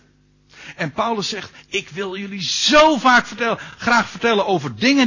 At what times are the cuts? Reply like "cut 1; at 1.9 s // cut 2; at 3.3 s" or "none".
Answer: none